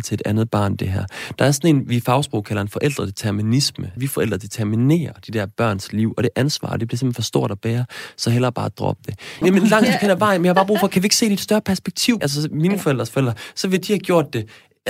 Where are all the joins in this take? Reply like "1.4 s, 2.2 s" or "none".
4.0 s, 9.4 s, 12.2 s

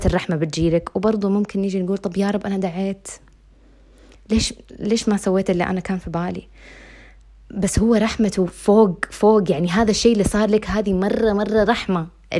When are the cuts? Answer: none

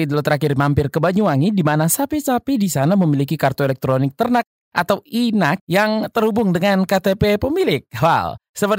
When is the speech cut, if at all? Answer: 5.6 s

